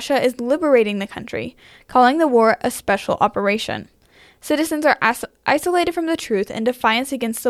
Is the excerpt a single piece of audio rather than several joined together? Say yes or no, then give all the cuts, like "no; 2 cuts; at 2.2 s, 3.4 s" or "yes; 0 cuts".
yes; 0 cuts